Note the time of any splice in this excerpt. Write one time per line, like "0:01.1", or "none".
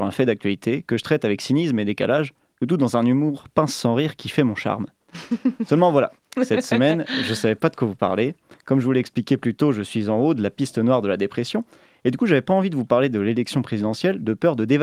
none